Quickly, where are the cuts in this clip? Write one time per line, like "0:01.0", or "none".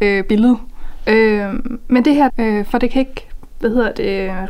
0:01.1
0:02.3